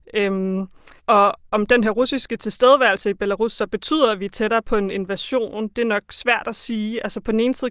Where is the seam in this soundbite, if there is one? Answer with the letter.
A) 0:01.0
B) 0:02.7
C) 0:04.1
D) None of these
A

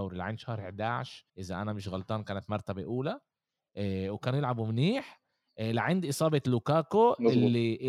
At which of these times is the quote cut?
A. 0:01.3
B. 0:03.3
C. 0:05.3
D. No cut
A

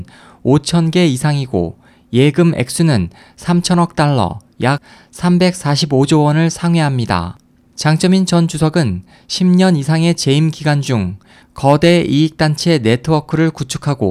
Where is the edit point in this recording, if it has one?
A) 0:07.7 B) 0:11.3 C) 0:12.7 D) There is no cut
A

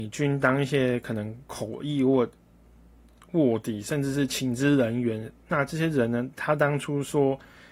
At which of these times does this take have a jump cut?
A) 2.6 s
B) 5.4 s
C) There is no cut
C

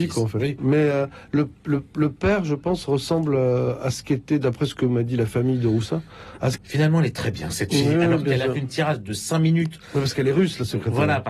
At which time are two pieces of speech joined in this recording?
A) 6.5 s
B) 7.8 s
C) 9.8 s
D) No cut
A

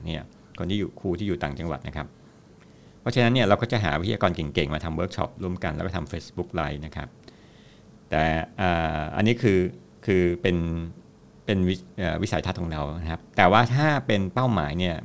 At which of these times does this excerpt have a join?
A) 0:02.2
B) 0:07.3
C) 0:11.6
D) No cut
D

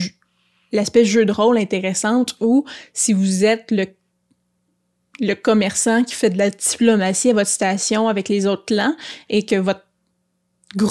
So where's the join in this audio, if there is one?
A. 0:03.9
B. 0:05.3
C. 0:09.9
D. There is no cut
D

